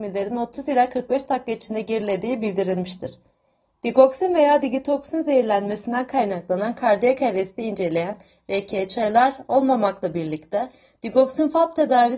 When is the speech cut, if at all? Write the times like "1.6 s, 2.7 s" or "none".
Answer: none